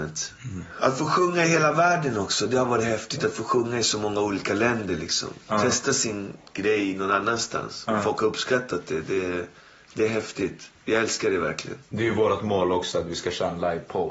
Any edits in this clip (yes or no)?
no